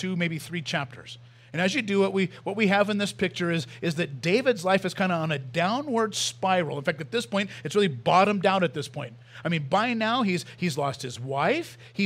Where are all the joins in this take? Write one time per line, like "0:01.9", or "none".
none